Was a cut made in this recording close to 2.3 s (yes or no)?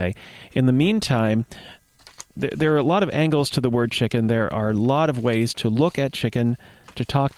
yes